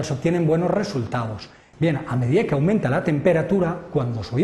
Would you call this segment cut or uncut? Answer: cut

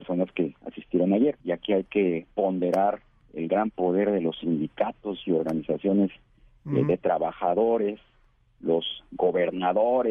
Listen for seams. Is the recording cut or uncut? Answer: cut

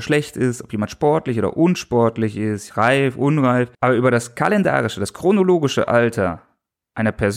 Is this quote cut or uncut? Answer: cut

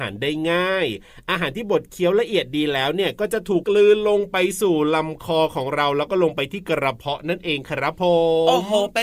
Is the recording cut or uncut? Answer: cut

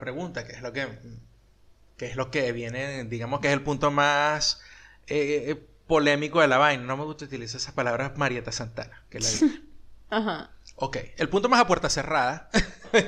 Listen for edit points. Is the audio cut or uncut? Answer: uncut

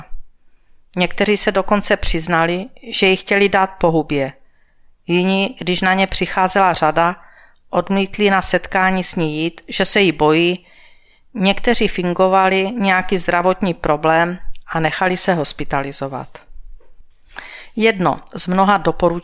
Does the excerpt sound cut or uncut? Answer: uncut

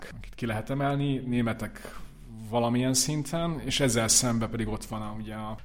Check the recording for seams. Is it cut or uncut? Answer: uncut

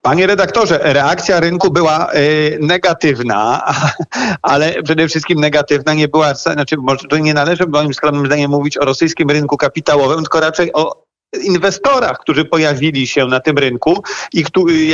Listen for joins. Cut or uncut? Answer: uncut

